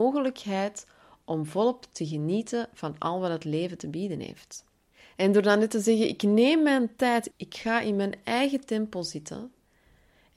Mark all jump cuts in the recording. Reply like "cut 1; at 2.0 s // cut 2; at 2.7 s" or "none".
cut 1; at 7.3 s